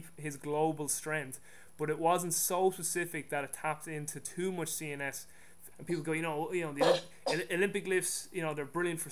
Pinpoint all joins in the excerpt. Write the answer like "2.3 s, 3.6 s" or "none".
5.7 s